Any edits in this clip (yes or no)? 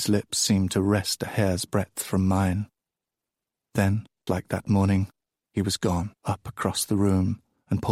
yes